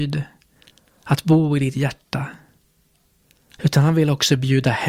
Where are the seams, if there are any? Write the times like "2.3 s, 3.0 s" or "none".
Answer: 3.6 s